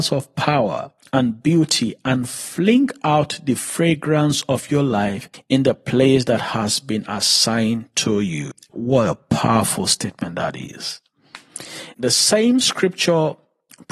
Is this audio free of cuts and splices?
no; 2 cuts; at 8.7 s, 11.9 s

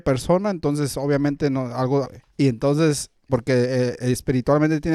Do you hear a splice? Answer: yes; 2 cuts; at 2.0 s, 3.3 s

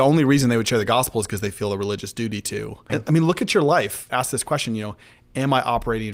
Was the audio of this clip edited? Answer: yes; 2 cuts; at 2.9 s, 4.1 s

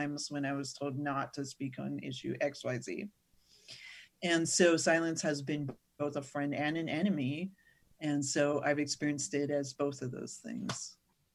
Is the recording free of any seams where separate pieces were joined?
yes; 0 cuts

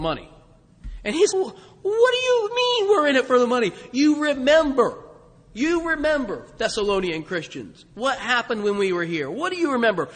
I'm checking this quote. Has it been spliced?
yes; 1 cut; at 1.3 s

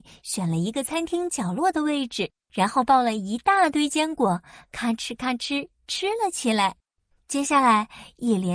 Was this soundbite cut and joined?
yes; 1 cut; at 7.2 s

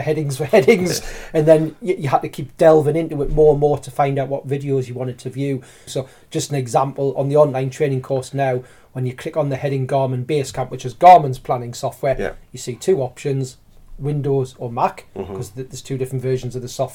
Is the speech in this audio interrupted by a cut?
yes; 1 cut; at 5.9 s

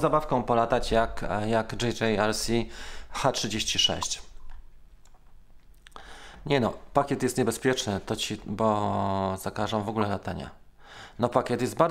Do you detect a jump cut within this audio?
no; 0 cuts

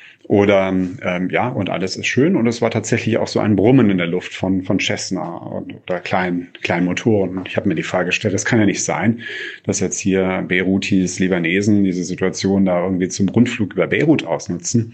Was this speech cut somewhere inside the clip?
no; 0 cuts

